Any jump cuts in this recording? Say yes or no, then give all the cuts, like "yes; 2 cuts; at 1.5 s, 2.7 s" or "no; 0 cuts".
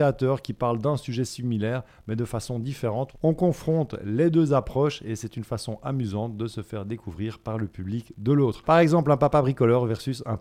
no; 0 cuts